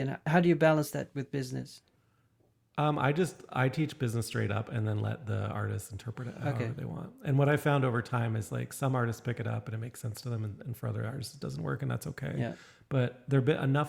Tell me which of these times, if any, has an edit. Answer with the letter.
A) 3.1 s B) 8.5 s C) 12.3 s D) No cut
D